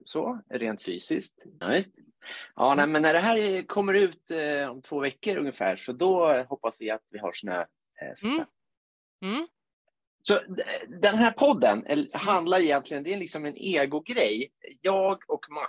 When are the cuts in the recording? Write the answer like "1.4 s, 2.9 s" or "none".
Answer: 1.6 s